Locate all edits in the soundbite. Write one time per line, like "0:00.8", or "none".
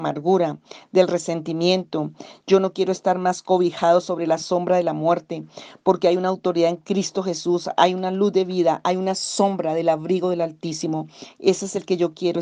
none